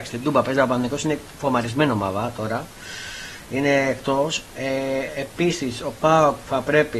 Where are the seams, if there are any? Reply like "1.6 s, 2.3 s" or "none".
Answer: none